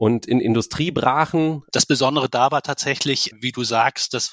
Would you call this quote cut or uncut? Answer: cut